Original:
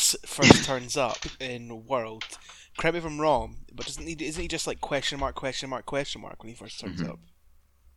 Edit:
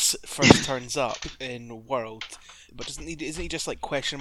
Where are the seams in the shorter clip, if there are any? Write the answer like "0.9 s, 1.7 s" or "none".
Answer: 2.7 s